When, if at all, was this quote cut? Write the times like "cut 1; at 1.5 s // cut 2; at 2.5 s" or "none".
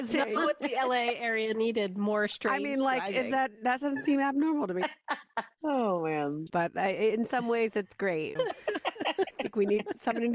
cut 1; at 6.5 s // cut 2; at 8.4 s

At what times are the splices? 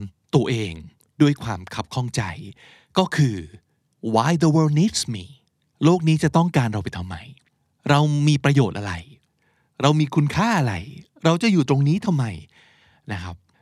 none

